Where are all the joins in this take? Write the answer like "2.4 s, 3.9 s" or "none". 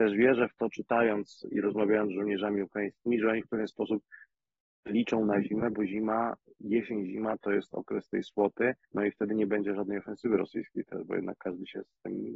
8.8 s

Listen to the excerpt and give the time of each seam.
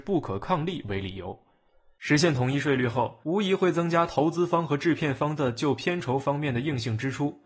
none

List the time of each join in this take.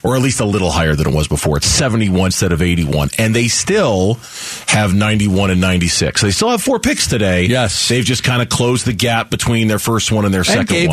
2.3 s

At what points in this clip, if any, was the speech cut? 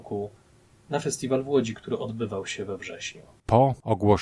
none

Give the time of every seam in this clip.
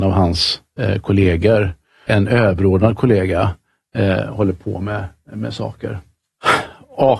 2.1 s

